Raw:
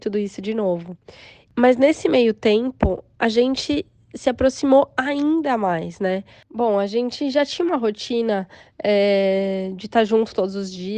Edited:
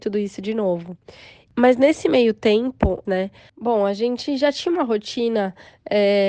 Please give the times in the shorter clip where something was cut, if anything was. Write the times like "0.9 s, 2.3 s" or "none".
3.1 s